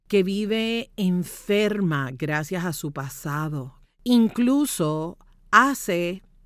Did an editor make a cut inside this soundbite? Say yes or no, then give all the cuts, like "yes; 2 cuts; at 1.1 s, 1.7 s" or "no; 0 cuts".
yes; 1 cut; at 3.8 s